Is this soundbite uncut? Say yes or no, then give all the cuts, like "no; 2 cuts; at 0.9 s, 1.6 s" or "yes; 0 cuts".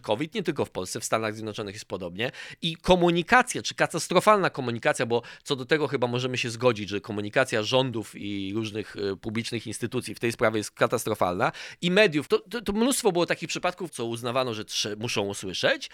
no; 2 cuts; at 12.3 s, 13.9 s